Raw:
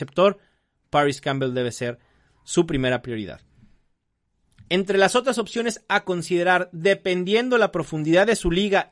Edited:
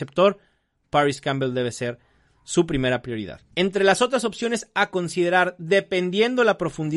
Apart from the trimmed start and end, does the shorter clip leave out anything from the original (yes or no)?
yes